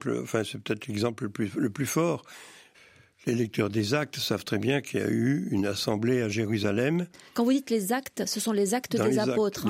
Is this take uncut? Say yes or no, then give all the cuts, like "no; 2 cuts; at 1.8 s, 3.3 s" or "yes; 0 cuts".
yes; 0 cuts